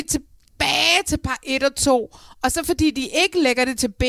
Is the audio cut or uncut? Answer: uncut